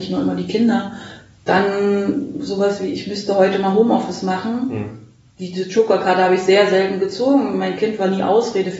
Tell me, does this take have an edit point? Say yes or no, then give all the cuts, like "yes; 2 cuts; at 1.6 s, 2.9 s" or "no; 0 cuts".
no; 0 cuts